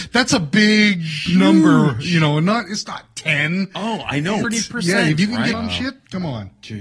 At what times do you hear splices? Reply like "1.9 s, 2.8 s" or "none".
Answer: 4.4 s, 5.5 s